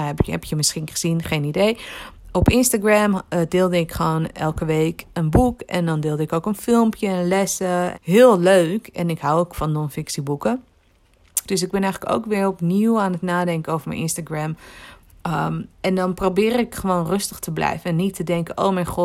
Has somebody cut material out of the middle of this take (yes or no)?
yes